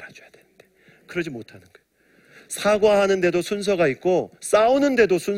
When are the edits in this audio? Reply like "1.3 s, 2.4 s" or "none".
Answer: none